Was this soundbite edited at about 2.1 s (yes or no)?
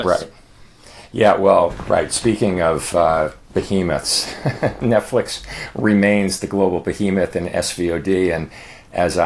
no